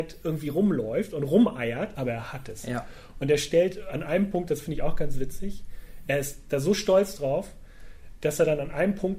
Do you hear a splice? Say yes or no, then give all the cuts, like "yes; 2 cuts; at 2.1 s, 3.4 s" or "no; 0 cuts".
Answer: yes; 1 cut; at 1.9 s